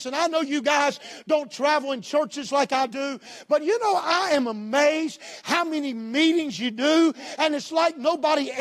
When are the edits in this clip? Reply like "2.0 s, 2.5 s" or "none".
none